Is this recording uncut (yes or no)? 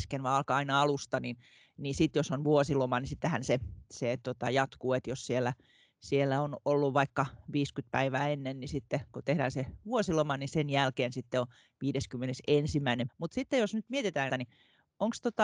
no